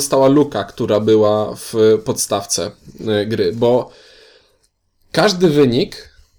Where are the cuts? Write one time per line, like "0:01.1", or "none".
none